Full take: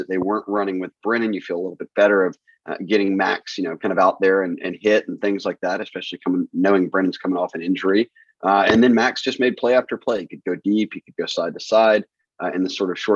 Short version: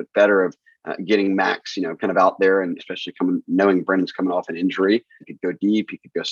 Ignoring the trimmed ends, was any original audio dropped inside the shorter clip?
yes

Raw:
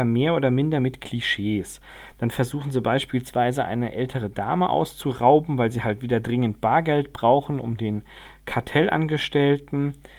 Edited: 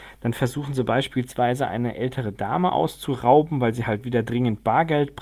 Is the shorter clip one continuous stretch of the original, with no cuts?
yes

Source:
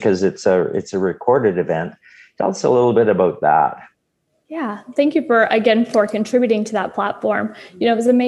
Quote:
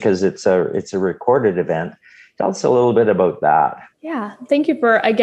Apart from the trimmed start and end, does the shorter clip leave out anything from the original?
yes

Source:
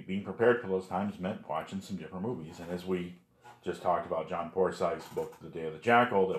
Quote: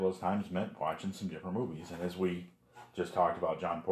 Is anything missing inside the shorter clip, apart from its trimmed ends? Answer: no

